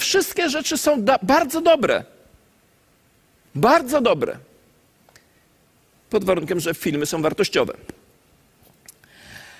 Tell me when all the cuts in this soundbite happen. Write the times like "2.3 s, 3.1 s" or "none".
none